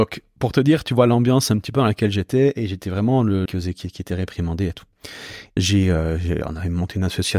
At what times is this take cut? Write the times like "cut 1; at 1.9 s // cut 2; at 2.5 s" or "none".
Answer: cut 1; at 3.5 s // cut 2; at 5.6 s